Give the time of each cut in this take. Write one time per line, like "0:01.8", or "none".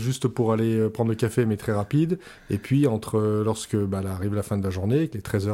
none